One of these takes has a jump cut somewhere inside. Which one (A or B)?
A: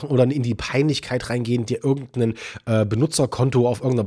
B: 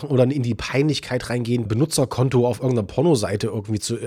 B